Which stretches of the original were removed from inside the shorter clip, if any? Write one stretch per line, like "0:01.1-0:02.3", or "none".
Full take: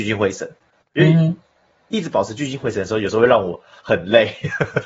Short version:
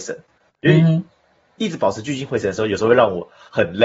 none